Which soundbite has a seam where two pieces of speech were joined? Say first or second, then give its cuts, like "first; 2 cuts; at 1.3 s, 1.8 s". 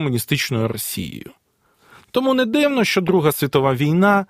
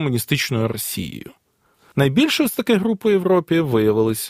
second; 1 cut; at 1.9 s